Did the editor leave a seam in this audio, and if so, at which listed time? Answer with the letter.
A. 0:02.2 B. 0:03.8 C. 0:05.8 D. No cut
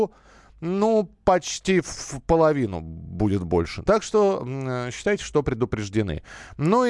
B